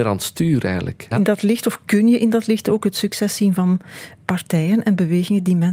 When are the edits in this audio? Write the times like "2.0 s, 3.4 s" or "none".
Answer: 1.1 s